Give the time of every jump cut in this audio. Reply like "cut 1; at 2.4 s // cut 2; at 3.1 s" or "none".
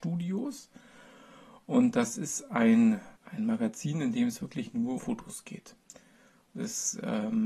cut 1; at 3.2 s // cut 2; at 5.0 s